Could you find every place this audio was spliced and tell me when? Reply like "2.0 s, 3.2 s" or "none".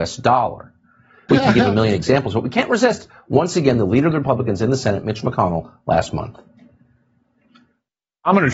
1.3 s